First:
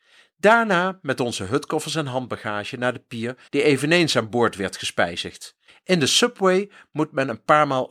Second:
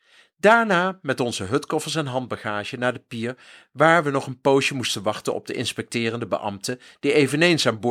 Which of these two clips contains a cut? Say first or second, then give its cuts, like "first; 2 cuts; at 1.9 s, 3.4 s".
first; 2 cuts; at 3.5 s, 5.7 s